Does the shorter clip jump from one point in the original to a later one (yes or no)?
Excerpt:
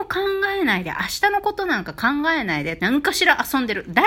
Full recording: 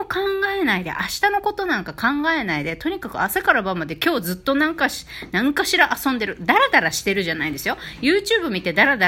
yes